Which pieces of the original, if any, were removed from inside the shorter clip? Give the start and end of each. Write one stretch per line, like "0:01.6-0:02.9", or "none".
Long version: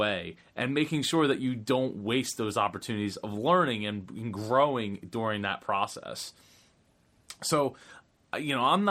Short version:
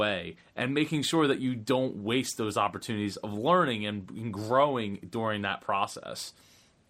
none